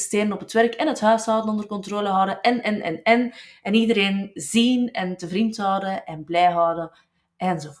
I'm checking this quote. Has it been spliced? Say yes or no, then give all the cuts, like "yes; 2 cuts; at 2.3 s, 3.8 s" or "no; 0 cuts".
yes; 1 cut; at 2.6 s